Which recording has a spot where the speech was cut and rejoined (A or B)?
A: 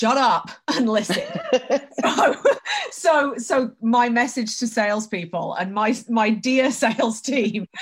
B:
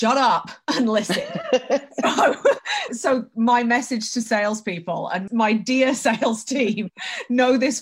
B